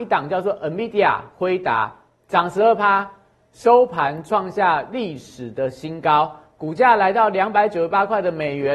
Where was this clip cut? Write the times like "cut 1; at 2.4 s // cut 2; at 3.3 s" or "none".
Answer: none